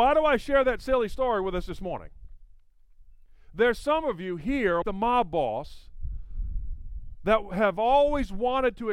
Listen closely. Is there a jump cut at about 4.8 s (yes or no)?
yes